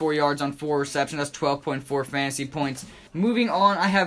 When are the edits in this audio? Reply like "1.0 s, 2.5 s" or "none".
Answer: 3.1 s